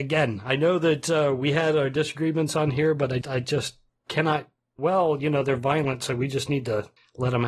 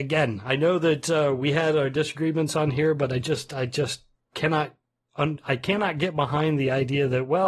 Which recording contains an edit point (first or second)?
first